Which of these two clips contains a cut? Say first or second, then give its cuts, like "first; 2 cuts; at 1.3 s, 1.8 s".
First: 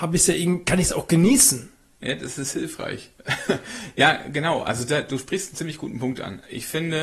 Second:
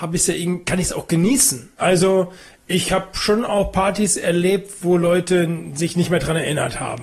second; 1 cut; at 1.8 s